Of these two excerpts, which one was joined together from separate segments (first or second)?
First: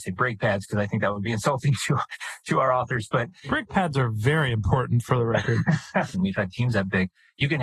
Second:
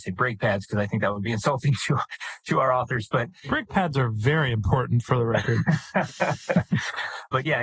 first